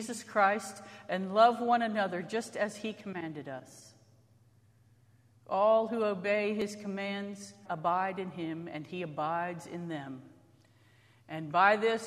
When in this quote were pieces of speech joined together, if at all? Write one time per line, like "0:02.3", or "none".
0:07.6